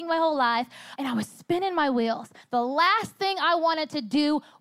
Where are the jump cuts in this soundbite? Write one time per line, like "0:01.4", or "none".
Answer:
0:01.0
0:02.4